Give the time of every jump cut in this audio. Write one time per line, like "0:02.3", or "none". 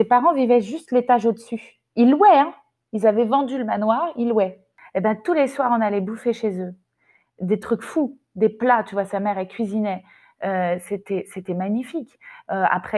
none